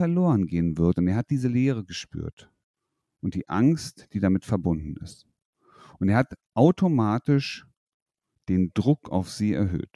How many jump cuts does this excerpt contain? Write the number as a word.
zero